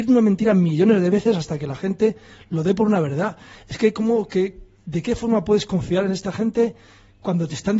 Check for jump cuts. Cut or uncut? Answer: uncut